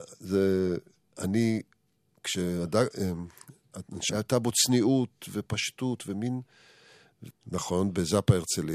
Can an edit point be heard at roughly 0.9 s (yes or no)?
no